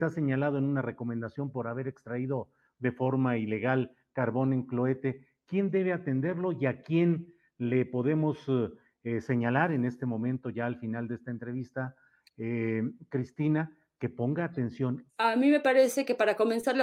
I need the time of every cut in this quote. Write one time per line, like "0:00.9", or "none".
0:15.1